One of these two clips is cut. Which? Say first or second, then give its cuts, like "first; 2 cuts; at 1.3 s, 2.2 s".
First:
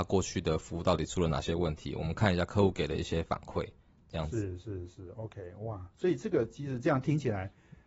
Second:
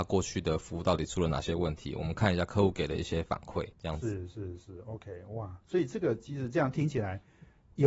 second; 1 cut; at 3.7 s